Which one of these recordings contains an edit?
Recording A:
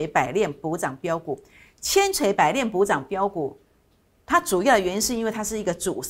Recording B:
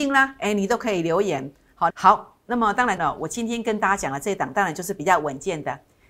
B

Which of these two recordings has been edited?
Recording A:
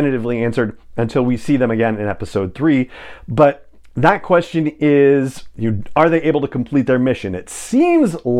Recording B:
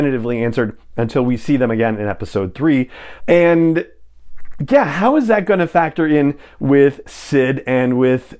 B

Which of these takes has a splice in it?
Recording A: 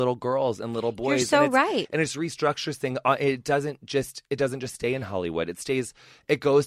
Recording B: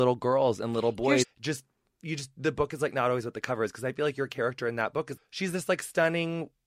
B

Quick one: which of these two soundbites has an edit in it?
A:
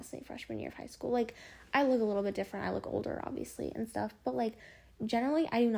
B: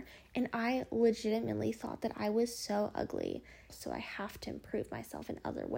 B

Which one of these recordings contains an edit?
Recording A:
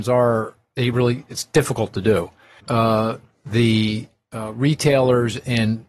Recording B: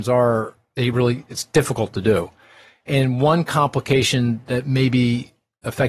A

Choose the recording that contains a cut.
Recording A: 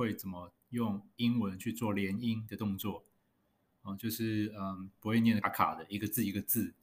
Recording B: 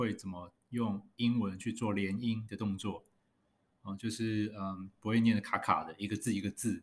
A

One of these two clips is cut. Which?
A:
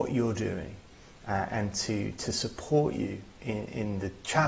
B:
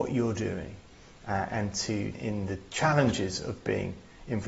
B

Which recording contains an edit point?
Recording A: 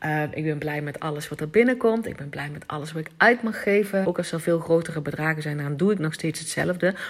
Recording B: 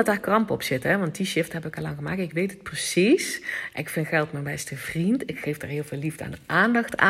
A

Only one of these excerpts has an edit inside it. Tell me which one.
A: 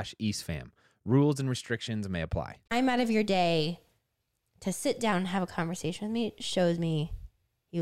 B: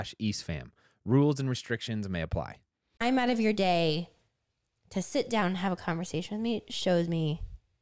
A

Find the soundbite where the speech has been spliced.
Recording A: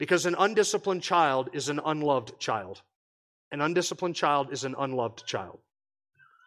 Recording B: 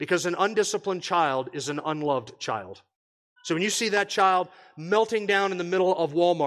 B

